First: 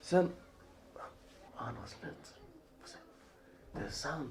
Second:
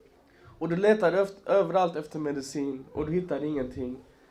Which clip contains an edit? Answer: first; 1 cut; at 1.5 s

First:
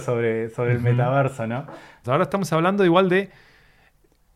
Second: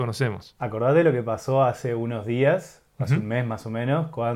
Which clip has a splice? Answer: first; 1 cut; at 2.0 s

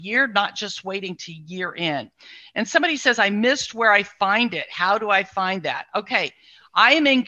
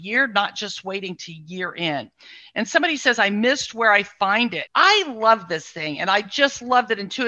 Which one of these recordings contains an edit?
second; 1 cut; at 4.7 s

